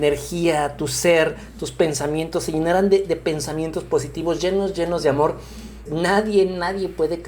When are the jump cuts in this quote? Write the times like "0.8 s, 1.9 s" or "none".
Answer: 4.4 s, 5.9 s

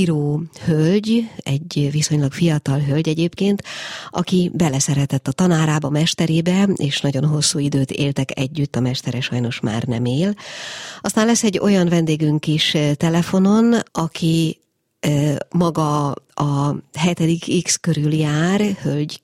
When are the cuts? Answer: 13.9 s

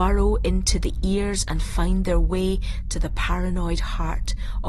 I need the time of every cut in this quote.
none

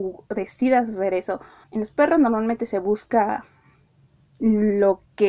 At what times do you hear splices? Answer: 1.6 s

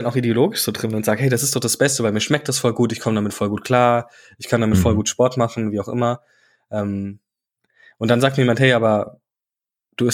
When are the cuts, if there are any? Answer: none

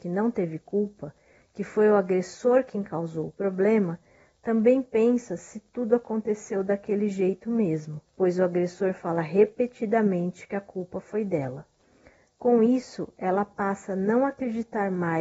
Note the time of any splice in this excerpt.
8.1 s

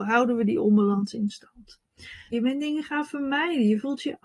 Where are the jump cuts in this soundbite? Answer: 2.3 s

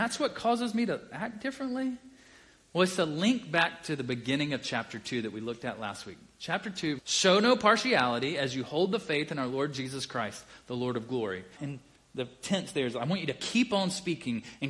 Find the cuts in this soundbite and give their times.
7.0 s, 11.6 s

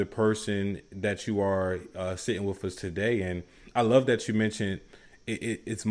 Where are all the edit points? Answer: none

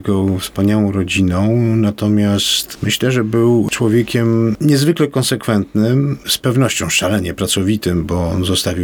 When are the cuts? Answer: none

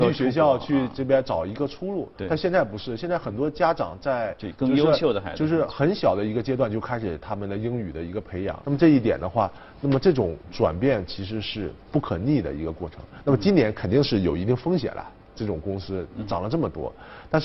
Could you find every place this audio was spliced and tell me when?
8.6 s

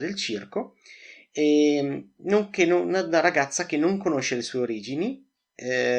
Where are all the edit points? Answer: none

